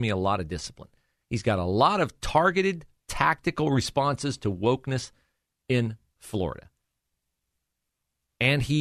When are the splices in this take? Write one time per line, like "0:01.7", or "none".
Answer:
none